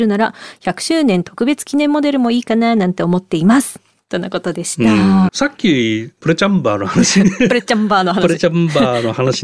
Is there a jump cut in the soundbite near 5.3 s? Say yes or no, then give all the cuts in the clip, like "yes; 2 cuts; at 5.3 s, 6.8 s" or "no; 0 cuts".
yes; 1 cut; at 5.3 s